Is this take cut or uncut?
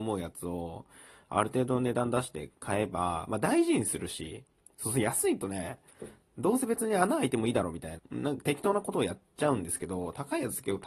cut